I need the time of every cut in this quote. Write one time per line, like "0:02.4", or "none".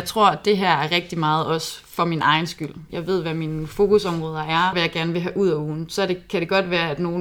0:02.9
0:04.7